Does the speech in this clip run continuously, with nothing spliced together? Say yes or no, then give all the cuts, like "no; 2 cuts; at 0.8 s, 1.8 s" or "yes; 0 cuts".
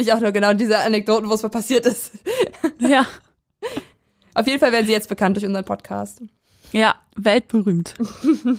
yes; 0 cuts